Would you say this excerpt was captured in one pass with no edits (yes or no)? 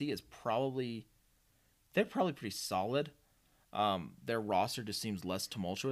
yes